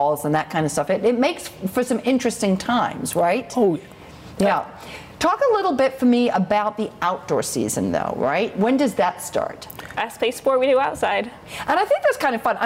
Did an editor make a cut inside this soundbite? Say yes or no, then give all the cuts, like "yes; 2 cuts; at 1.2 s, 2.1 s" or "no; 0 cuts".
yes; 1 cut; at 10.0 s